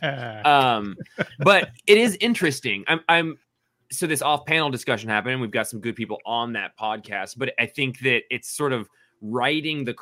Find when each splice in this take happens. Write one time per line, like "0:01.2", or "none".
none

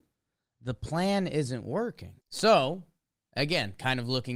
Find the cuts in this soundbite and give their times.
0:02.2

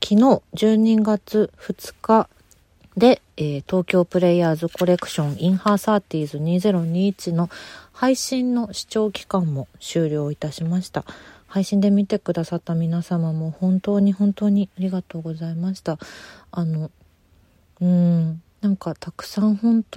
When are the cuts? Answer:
0:03.3
0:18.5

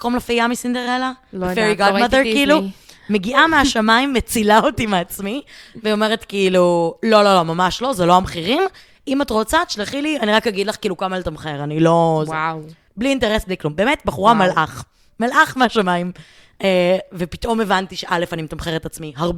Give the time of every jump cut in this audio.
none

